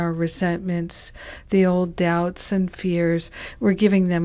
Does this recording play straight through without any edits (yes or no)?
no